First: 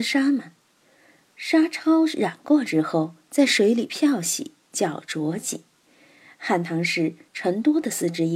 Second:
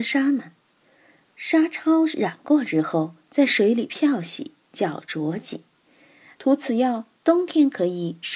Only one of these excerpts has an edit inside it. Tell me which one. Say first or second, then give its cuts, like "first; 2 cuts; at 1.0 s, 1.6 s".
second; 1 cut; at 6.4 s